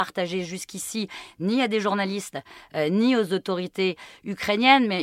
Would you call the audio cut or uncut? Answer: uncut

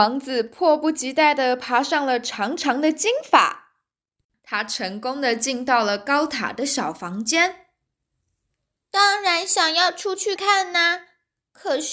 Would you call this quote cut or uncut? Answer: cut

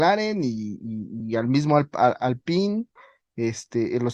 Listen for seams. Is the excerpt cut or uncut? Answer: uncut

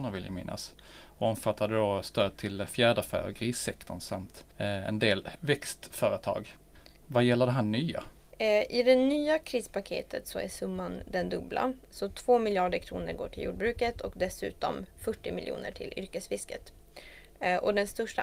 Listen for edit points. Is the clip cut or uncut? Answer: uncut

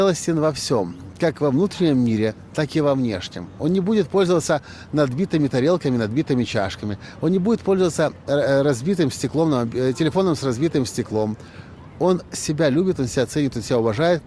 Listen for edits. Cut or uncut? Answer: uncut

